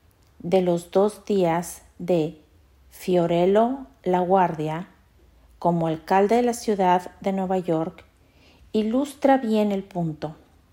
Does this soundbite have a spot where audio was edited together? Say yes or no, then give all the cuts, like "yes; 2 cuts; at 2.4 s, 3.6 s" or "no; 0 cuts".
no; 0 cuts